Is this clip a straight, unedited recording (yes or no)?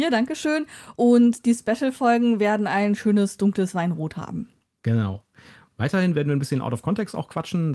yes